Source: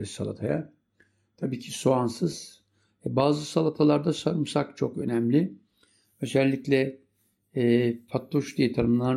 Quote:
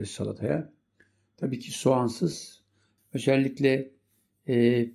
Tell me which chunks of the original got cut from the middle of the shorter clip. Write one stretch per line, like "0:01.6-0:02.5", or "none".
0:03.0-0:06.1